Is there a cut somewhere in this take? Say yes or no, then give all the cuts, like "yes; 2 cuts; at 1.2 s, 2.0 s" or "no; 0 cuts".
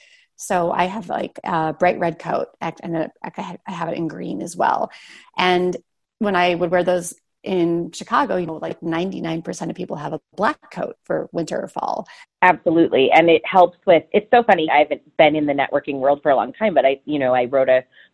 yes; 2 cuts; at 12.2 s, 14.7 s